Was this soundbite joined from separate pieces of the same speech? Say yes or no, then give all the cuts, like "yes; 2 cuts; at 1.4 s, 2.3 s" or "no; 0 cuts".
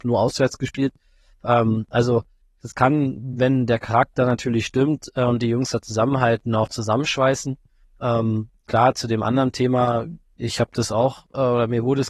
no; 0 cuts